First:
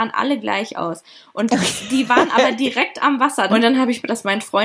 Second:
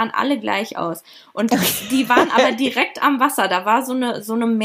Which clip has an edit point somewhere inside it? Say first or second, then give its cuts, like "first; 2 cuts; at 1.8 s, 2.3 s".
first; 1 cut; at 3.5 s